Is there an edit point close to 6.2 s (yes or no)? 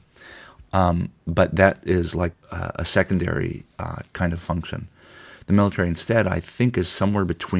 no